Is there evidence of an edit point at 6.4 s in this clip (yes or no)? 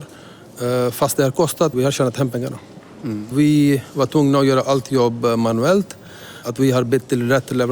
yes